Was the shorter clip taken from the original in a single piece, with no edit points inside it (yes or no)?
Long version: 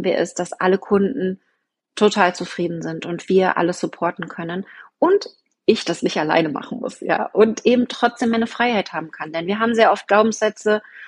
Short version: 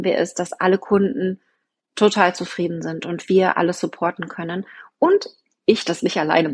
yes